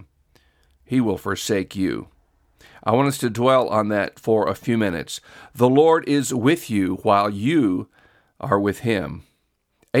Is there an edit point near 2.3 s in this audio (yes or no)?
no